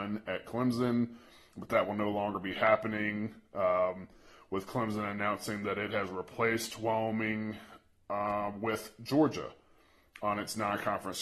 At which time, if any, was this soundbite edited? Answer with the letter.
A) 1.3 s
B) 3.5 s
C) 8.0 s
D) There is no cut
D